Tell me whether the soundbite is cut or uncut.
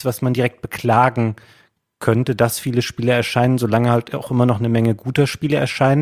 uncut